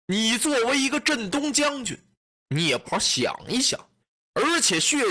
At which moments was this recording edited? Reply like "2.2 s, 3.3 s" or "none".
2.8 s, 4.1 s

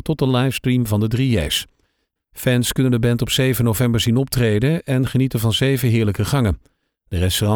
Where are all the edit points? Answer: 2.2 s

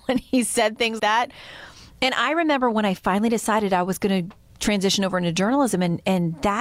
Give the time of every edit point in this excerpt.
1.0 s

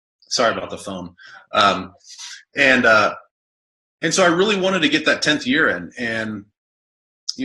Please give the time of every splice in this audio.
none

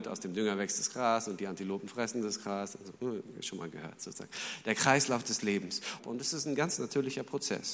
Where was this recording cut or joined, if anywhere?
6.0 s

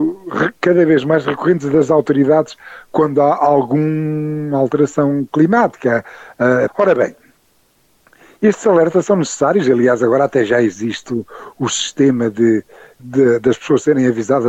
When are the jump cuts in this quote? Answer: 6.7 s, 11.5 s, 13.0 s

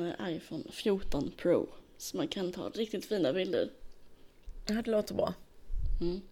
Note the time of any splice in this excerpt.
none

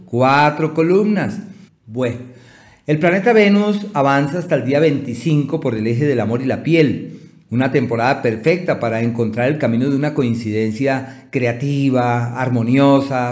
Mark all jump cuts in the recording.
1.7 s

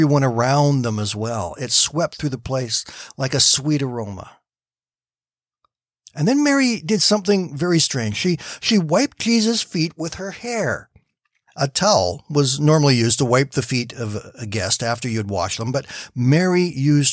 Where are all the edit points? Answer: none

